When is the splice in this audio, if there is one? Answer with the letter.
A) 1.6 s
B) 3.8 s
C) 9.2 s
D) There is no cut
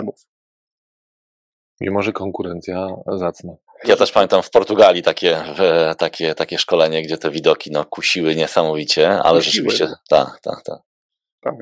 B